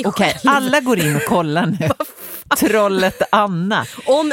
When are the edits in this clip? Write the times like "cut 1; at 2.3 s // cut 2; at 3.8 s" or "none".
none

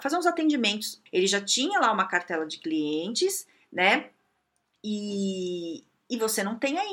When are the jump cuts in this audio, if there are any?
cut 1; at 1.1 s

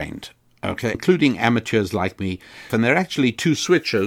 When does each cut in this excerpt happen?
cut 1; at 0.9 s // cut 2; at 2.7 s

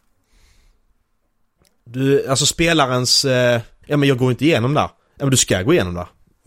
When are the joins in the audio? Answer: cut 1; at 3.8 s

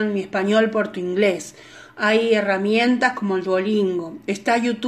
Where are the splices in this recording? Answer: none

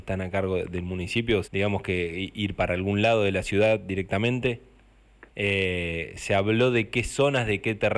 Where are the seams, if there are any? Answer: cut 1; at 1.4 s // cut 2; at 5.3 s

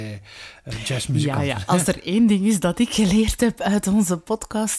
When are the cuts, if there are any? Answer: none

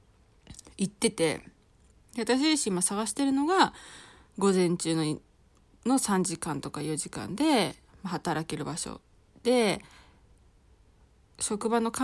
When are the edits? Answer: none

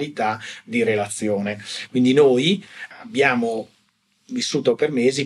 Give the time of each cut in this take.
cut 1; at 1.9 s

